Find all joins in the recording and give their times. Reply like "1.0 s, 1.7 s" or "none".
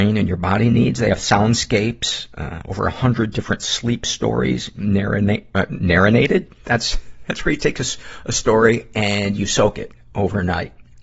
none